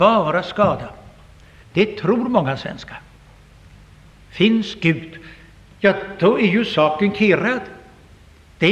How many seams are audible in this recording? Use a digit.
1